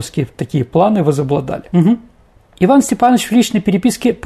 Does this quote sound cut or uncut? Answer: uncut